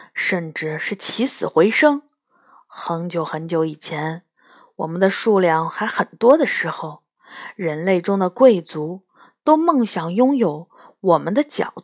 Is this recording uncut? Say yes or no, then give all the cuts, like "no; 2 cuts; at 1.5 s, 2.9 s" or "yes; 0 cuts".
yes; 0 cuts